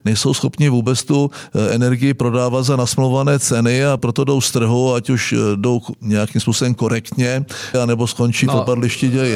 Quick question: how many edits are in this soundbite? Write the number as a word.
two